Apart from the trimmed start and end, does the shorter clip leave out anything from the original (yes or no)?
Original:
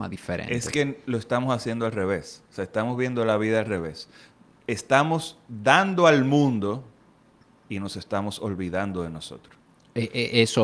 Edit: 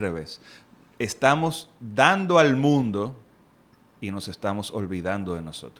no